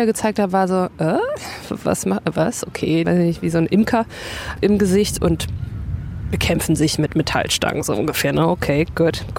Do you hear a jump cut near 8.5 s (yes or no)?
no